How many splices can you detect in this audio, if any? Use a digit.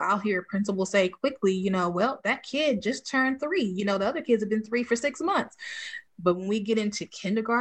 1